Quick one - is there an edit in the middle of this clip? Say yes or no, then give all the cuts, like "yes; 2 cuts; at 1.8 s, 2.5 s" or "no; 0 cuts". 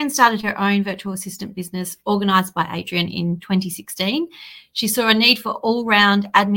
no; 0 cuts